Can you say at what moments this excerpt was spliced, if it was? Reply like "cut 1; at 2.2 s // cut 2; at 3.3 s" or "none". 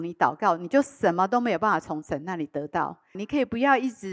cut 1; at 3.1 s